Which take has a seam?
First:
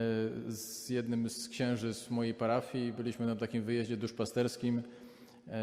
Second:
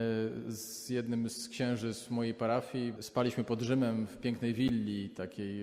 second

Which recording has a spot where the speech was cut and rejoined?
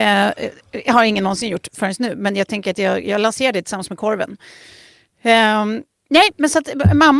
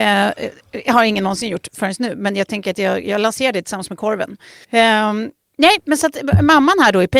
second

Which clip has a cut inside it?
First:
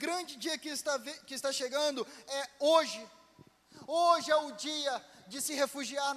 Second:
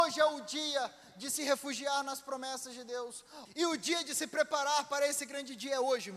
second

